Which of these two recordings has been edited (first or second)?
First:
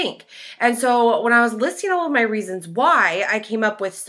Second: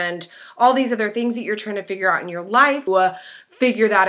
second